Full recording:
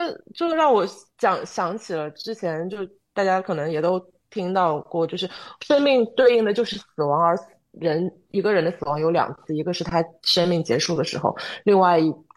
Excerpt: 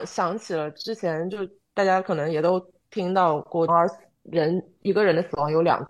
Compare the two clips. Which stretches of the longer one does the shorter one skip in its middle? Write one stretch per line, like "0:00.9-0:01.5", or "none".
0:05.1-0:07.2